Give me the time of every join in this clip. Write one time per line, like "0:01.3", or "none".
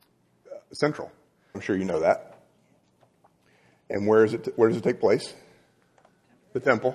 0:01.5